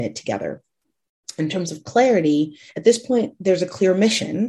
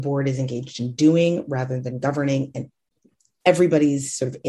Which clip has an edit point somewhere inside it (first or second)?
first